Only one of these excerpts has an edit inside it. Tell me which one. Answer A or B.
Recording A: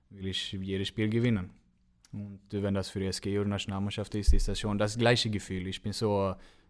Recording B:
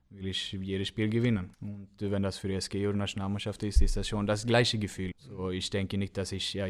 B